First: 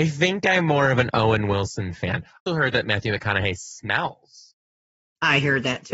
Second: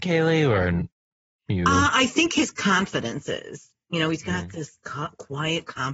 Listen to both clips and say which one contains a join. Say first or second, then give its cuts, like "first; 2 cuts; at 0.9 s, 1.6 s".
first; 1 cut; at 2.5 s